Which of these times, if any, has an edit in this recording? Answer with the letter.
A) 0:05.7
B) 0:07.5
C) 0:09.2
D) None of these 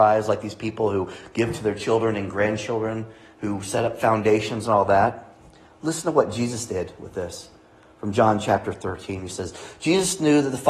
D